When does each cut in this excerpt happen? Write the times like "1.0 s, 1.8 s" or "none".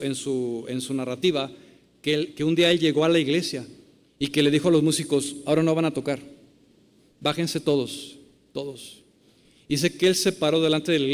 none